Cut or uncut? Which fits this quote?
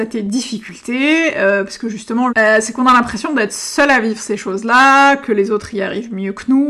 cut